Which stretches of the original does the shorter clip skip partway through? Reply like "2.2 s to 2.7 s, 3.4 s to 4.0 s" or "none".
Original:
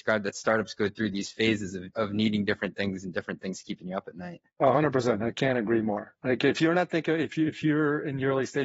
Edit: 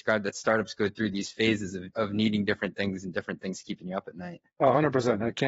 none